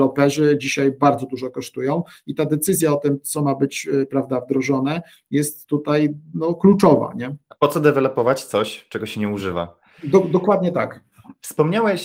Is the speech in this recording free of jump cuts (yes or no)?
yes